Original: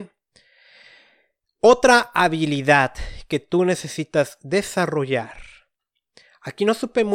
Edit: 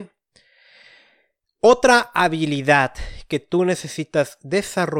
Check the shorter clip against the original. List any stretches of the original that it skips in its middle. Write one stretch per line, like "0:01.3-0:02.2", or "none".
none